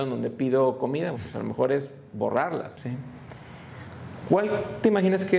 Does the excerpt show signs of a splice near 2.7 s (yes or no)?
yes